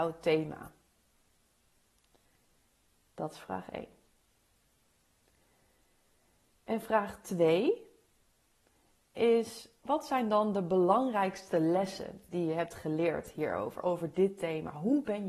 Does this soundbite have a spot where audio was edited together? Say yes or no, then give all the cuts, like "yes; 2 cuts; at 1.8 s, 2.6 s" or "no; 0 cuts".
yes; 1 cut; at 9.8 s